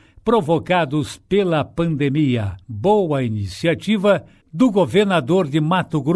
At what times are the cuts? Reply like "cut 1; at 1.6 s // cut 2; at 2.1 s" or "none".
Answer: cut 1; at 2.6 s